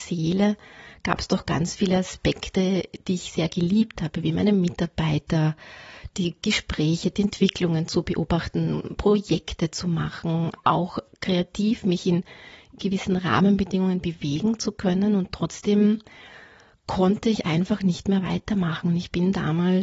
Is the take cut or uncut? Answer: uncut